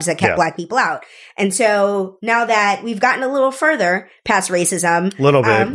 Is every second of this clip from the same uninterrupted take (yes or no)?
yes